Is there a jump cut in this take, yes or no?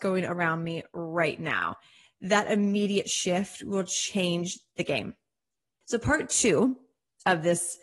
no